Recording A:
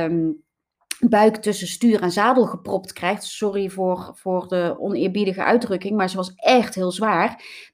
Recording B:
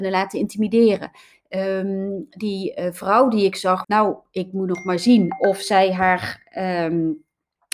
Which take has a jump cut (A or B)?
B